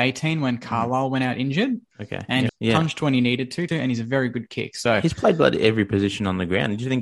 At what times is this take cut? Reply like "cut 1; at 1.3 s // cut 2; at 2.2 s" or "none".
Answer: cut 1; at 2.5 s // cut 2; at 3.7 s